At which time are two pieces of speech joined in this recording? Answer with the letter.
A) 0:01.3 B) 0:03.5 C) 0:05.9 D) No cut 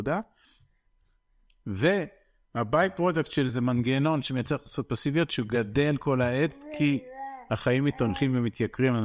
B